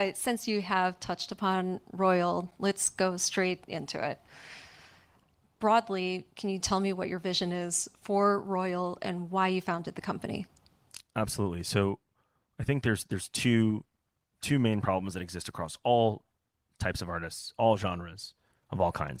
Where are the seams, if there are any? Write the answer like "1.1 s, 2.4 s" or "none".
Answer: none